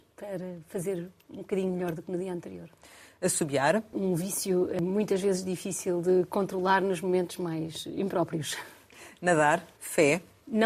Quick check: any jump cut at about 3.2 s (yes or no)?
no